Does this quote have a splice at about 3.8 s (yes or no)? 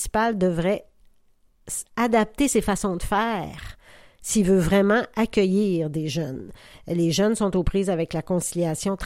no